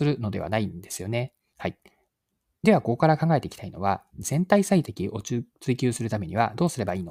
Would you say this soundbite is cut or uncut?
cut